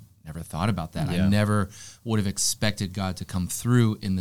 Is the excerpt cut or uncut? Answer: uncut